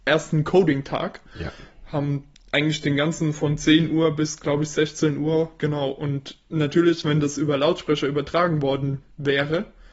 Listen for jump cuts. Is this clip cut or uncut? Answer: cut